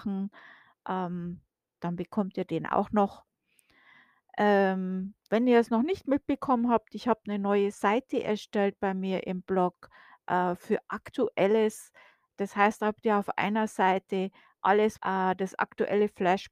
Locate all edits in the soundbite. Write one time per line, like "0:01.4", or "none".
0:15.0